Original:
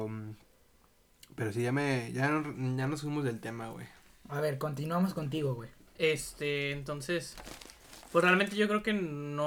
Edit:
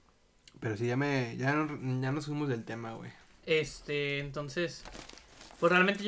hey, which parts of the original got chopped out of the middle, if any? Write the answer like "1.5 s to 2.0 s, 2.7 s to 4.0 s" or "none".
4.1 s to 5.9 s